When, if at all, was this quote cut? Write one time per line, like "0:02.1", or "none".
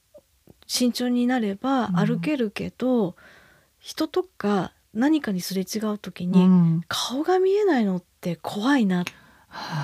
none